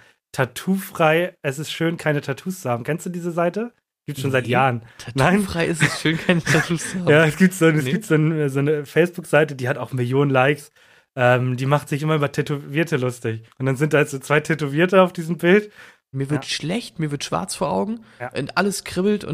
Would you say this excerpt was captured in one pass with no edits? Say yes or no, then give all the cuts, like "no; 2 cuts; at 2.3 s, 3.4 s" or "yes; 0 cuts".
no; 2 cuts; at 13.5 s, 16.1 s